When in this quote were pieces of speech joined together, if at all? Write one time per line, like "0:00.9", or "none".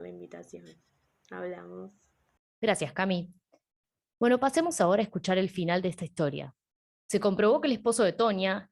none